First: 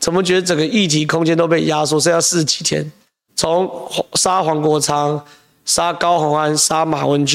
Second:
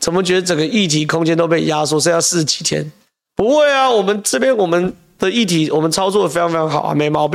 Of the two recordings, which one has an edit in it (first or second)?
first